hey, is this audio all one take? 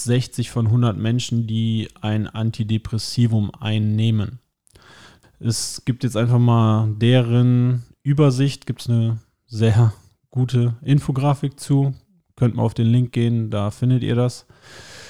no; 1 cut; at 5.2 s

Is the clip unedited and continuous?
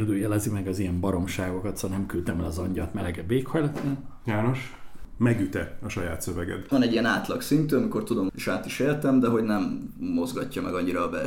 no; 3 cuts; at 4.3 s, 6.7 s, 8.3 s

